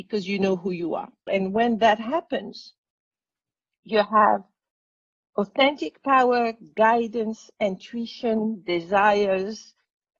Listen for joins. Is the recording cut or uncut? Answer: cut